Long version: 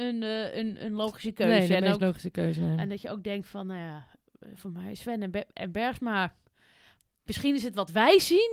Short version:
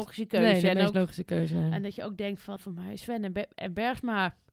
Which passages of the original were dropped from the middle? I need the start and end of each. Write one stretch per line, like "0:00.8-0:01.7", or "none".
0:03.6-0:04.5

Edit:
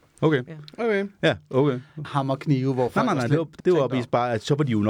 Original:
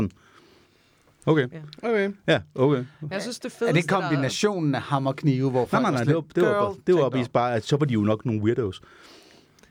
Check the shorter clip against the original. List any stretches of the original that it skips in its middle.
0:03.1-0:04.8
0:06.4-0:06.8

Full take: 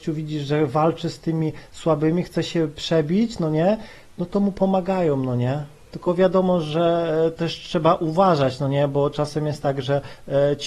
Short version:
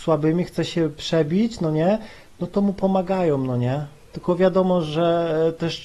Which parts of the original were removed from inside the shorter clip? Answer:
none

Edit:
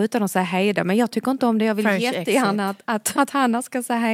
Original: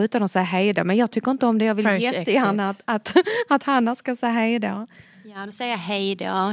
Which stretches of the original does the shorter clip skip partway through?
0:03.1-0:03.5

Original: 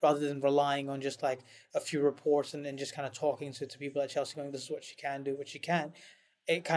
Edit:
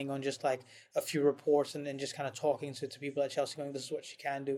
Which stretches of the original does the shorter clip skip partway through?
none

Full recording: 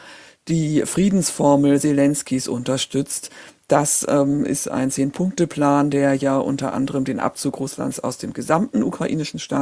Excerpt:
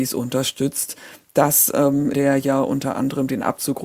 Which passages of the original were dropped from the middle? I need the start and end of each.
0:04.5-0:05.9

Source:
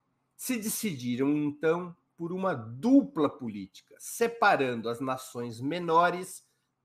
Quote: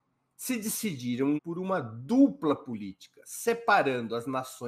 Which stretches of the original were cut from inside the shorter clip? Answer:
0:01.4-0:02.1

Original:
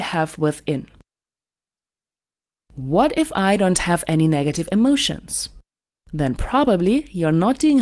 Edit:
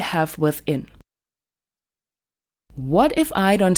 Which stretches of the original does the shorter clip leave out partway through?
none

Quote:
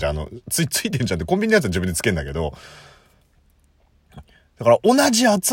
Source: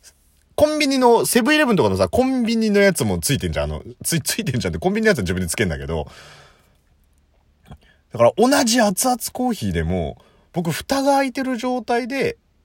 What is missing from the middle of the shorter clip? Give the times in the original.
none

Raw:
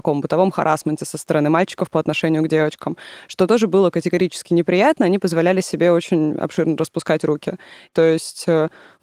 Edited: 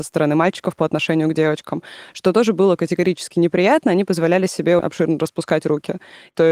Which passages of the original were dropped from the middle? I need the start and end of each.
0:05.9-0:06.4

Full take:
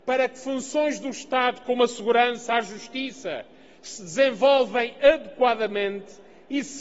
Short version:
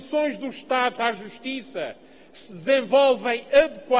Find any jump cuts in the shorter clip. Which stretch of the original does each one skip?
0:01.6-0:02.5

